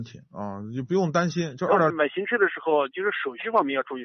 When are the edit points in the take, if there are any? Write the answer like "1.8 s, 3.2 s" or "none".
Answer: 1.9 s

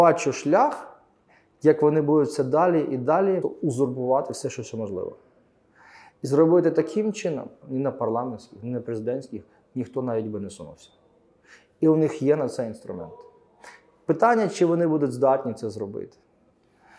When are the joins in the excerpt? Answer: 3.4 s, 7.6 s

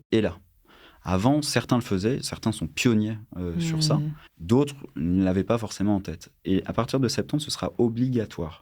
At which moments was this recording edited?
4.3 s

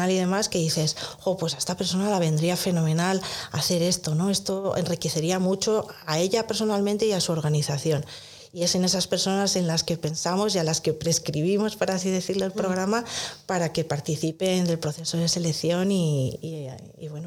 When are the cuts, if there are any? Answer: none

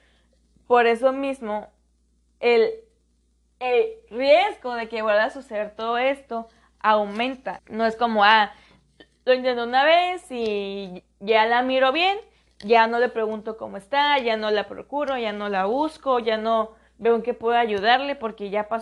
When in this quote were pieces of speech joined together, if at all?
7.6 s

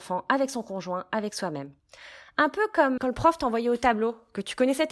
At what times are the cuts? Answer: 3.0 s

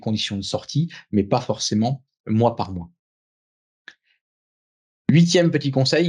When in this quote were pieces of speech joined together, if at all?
none

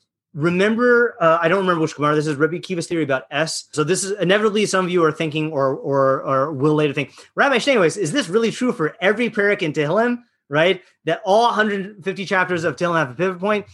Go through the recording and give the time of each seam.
3.7 s

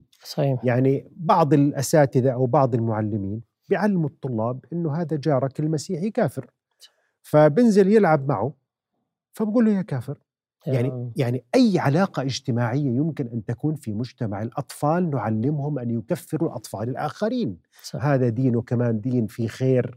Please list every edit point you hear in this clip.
18.0 s

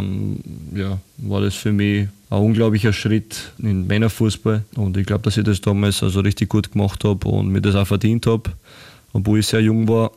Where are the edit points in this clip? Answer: none

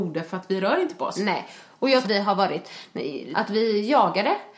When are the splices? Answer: 2.0 s, 3.3 s

